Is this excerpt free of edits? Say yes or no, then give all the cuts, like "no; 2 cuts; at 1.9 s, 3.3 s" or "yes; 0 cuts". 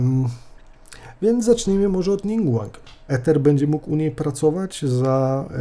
no; 1 cut; at 3.1 s